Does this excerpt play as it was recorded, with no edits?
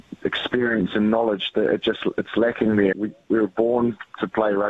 no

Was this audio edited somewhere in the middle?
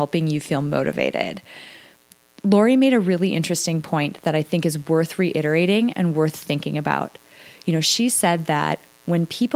no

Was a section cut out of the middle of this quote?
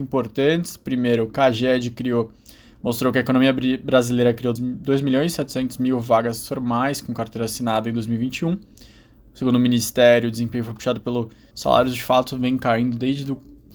yes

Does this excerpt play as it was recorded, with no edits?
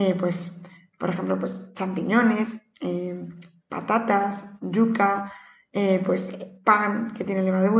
yes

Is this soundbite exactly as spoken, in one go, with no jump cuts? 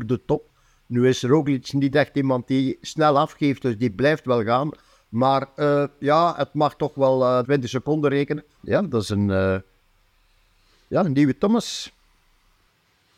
no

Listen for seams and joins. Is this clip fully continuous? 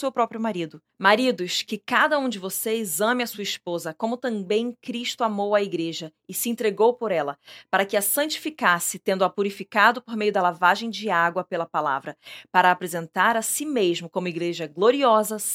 yes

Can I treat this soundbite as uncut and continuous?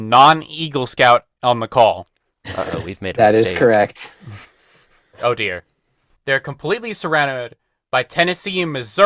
no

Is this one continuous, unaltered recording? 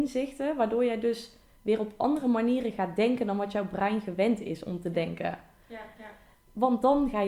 no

